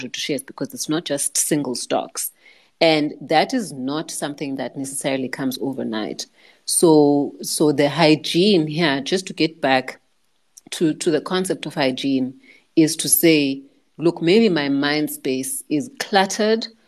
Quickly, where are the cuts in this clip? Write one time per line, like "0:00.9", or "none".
none